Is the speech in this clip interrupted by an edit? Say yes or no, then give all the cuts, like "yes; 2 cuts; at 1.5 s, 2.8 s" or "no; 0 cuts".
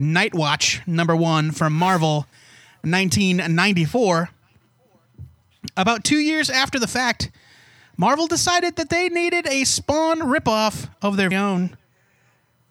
yes; 1 cut; at 11.3 s